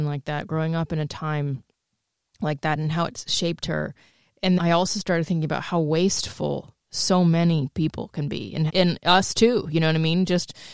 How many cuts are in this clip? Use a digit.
2